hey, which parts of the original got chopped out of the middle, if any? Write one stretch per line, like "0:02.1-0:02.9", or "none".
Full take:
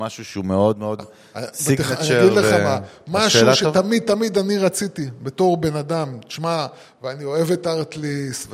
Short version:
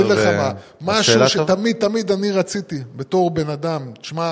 none